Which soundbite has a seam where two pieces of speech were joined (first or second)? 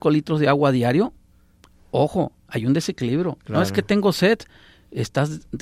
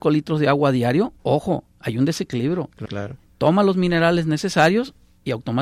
second